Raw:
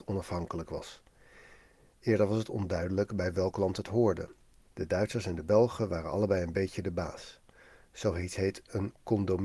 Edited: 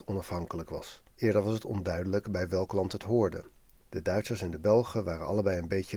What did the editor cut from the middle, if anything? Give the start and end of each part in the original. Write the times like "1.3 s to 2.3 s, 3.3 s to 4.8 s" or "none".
1.1 s to 2.0 s